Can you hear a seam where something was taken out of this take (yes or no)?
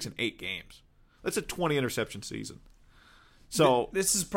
no